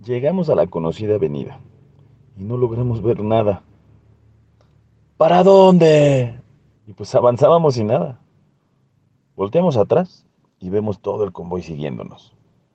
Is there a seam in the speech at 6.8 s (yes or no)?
yes